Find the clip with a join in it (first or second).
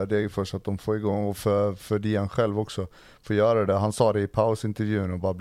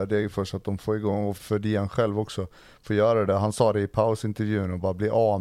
second